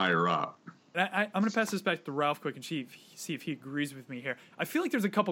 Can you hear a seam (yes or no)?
yes